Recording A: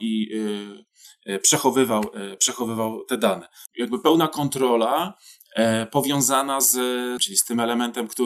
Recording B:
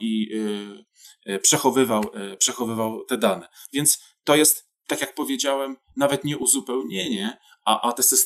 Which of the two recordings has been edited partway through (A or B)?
A